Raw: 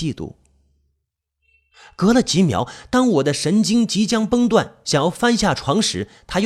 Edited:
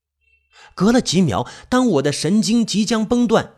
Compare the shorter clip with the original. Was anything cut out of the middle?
no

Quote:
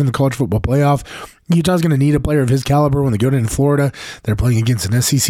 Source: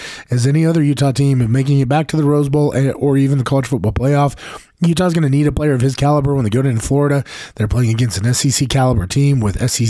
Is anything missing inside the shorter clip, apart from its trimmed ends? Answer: no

